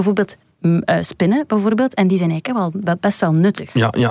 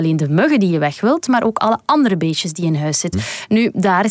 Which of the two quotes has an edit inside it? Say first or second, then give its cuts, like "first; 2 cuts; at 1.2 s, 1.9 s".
second; 1 cut; at 3.1 s